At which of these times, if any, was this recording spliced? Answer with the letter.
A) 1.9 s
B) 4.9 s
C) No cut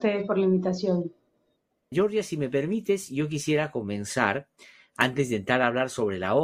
A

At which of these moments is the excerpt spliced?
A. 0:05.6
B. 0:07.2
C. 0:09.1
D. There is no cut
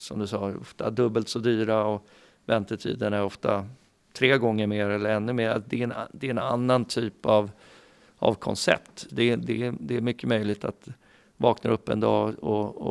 C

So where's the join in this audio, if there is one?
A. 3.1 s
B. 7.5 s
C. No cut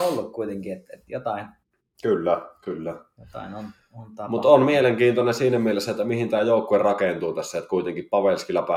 C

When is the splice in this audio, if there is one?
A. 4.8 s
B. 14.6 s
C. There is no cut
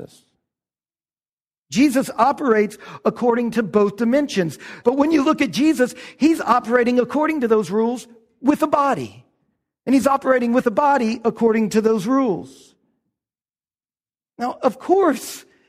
A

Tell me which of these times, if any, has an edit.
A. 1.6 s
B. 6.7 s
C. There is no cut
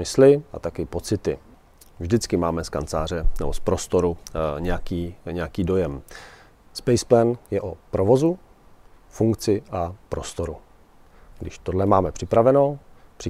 B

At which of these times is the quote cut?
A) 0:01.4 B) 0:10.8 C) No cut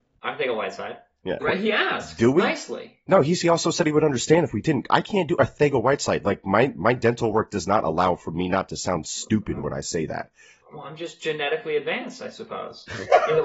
A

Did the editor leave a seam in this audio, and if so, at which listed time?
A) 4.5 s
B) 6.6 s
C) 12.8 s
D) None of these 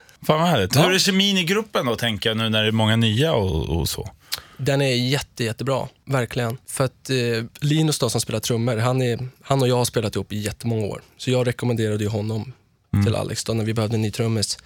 D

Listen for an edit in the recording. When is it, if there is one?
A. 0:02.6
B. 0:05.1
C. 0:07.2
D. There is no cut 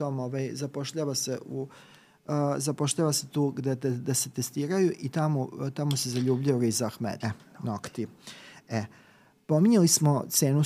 C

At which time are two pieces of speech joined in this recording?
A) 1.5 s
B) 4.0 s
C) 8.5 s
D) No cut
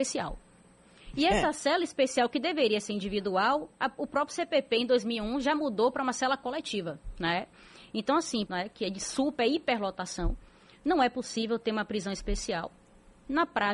C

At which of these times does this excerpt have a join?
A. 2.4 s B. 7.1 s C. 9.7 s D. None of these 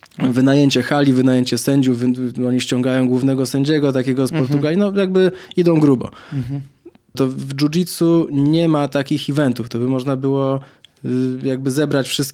B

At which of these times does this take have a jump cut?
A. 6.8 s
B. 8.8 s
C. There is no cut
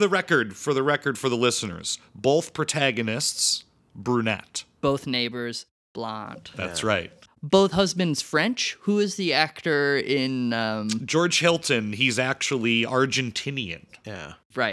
C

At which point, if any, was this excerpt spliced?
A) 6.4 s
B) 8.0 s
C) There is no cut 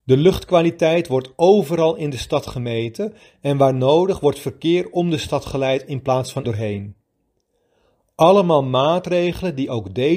A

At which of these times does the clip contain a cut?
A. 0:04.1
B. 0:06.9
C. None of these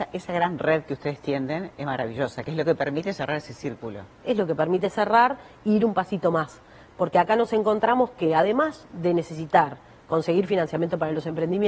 C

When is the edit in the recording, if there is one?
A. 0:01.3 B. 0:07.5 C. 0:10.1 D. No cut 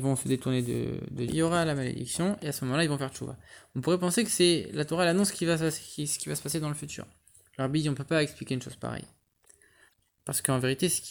A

